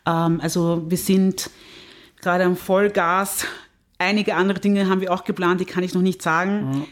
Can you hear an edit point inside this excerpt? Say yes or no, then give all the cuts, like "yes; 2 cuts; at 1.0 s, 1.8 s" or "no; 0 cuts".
no; 0 cuts